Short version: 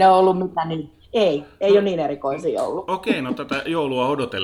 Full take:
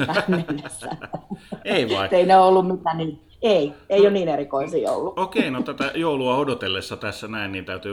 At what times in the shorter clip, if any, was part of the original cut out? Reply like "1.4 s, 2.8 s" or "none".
none